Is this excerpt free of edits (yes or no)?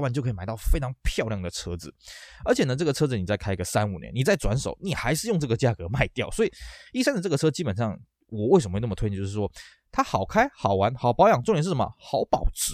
yes